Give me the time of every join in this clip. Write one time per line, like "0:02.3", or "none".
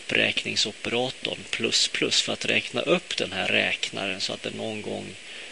none